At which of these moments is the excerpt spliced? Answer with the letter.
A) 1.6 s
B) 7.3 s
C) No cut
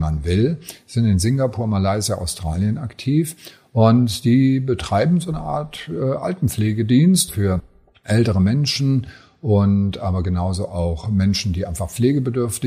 B